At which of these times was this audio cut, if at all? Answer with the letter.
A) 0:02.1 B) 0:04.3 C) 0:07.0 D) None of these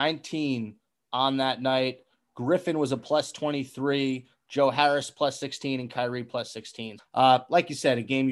C